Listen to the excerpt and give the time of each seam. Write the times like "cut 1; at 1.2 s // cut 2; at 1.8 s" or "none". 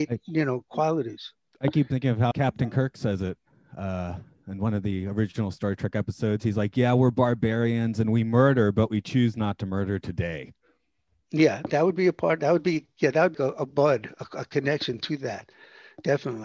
cut 1; at 2.3 s // cut 2; at 13.3 s

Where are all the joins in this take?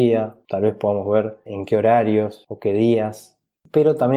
cut 1; at 1.5 s

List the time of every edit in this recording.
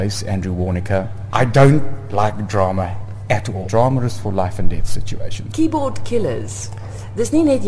cut 1; at 1.3 s // cut 2; at 3.7 s // cut 3; at 5.5 s

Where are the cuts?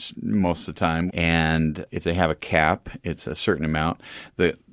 cut 1; at 1.1 s

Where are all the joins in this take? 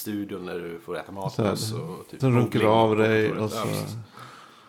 cut 1; at 2.2 s

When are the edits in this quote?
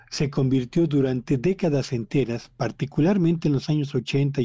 none

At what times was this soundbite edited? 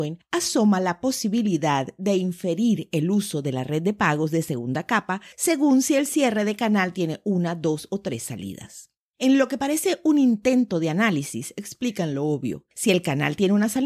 none

